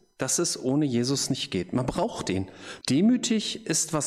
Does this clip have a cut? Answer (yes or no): yes